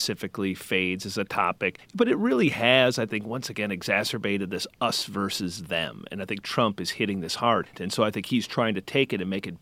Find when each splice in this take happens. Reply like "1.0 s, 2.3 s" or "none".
7.7 s